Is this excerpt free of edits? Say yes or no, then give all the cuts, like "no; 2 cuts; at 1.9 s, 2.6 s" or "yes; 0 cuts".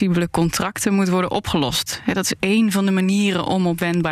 yes; 0 cuts